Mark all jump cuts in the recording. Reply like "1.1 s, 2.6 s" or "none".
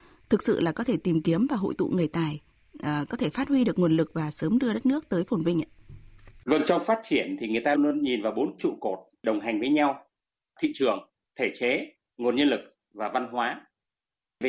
7.8 s

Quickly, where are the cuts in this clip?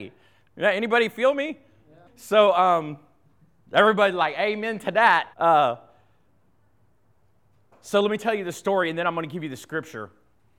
2.1 s, 5.3 s

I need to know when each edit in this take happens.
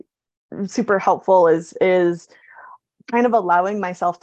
none

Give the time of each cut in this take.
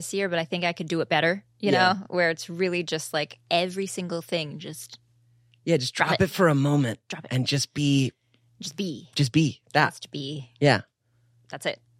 none

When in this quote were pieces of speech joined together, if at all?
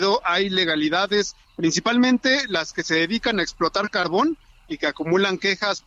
none

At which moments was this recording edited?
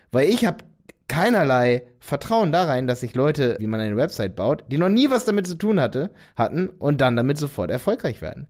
3.6 s

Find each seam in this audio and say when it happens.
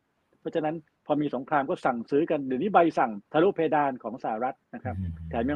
3.3 s

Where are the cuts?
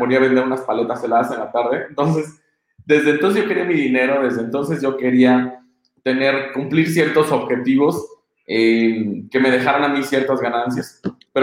none

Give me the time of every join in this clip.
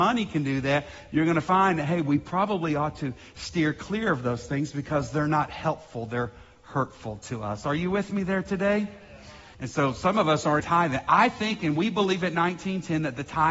9.5 s, 10.6 s

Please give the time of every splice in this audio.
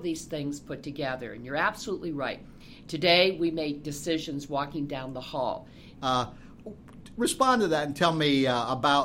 6.0 s

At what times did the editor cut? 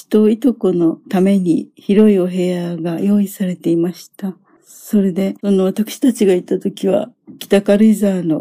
none

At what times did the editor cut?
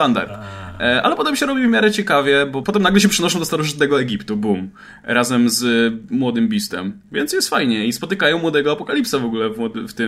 2.6 s

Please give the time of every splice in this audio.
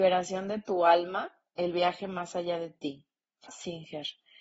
3.5 s

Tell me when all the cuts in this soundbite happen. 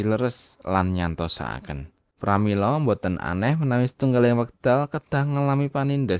2.1 s

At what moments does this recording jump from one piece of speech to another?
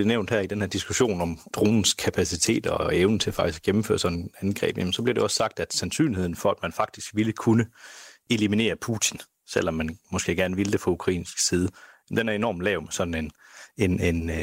none

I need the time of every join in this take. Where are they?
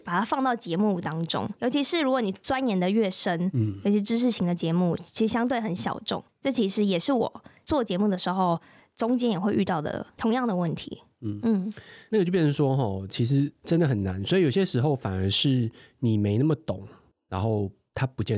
none

